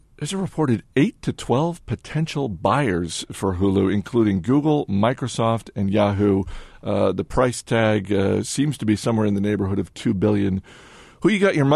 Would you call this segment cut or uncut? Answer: uncut